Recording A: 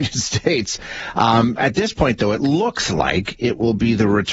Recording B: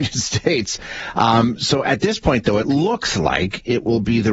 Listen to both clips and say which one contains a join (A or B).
A